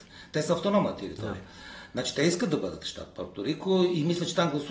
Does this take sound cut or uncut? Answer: uncut